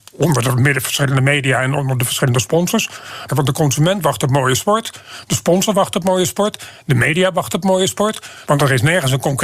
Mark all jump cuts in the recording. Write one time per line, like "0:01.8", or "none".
0:03.3
0:08.4